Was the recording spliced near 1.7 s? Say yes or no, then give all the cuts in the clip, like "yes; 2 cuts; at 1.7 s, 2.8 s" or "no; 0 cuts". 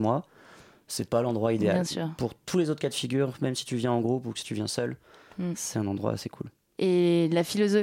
no; 1 cut; at 6.7 s